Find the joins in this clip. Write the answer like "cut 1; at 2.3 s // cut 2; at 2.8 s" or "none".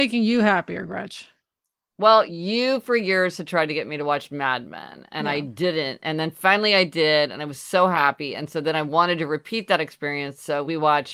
none